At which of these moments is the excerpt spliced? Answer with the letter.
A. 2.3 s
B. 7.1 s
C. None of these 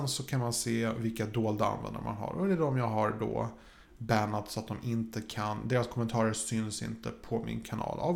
C